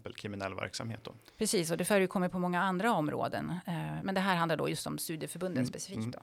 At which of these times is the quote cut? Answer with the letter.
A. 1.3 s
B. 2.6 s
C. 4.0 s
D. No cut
C